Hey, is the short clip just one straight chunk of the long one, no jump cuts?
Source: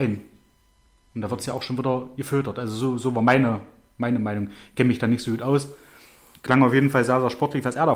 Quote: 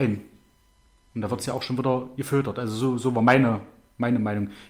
yes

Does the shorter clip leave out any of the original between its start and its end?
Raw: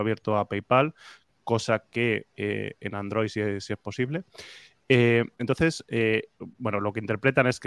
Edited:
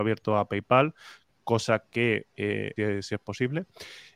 yes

